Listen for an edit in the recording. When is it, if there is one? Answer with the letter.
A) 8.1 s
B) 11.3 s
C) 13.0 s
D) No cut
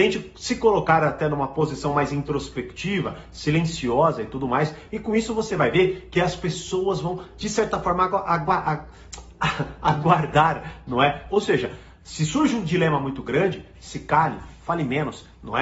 B